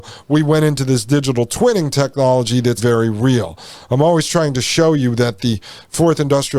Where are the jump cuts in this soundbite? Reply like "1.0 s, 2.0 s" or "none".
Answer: 2.8 s

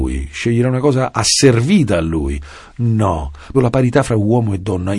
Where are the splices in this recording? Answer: 3.5 s

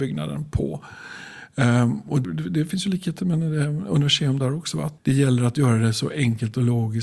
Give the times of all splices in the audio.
2.2 s, 5.0 s

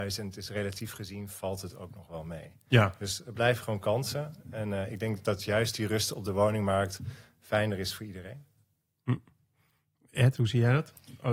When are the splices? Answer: none

